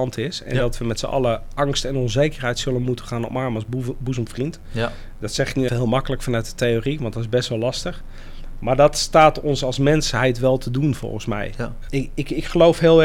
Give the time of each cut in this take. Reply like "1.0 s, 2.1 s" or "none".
5.7 s, 11.9 s